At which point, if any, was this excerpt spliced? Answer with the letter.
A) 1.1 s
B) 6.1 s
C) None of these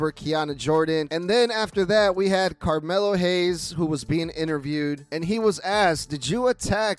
A